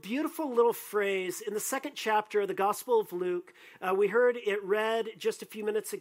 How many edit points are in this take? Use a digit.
0